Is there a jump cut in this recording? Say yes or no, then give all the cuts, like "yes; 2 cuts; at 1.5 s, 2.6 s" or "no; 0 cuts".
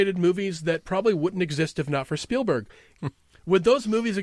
yes; 1 cut; at 3.0 s